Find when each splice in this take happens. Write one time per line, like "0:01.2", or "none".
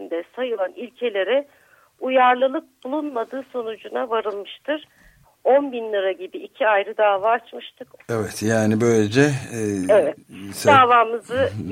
0:05.2
0:08.0